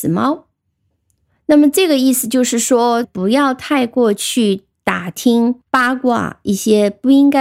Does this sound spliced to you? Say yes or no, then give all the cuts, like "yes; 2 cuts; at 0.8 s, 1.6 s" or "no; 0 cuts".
yes; 2 cuts; at 3.0 s, 5.6 s